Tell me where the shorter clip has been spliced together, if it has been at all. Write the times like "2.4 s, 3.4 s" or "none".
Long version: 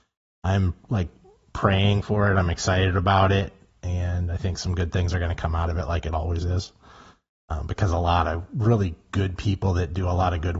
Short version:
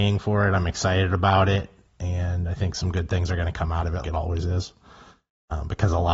4.0 s